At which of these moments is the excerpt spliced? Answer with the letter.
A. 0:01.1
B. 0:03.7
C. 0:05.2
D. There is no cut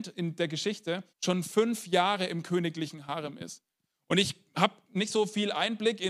A